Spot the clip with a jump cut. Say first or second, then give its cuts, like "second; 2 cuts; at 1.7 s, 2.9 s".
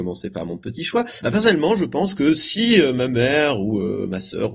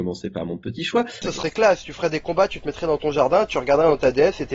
second; 1 cut; at 1.2 s